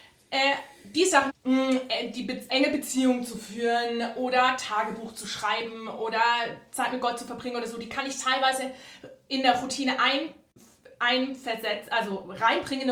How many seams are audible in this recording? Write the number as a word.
two